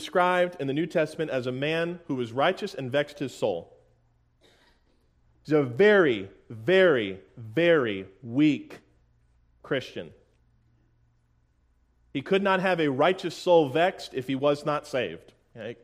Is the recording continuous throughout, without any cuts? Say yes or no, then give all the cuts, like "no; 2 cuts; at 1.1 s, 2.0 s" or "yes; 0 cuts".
no; 1 cut; at 7.3 s